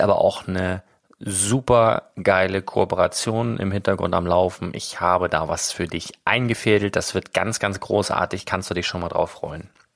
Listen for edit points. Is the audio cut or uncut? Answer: uncut